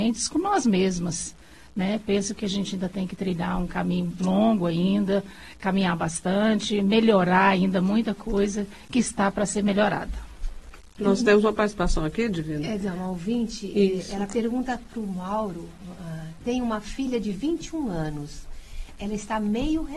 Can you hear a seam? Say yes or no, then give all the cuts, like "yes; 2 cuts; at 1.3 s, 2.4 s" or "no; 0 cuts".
no; 0 cuts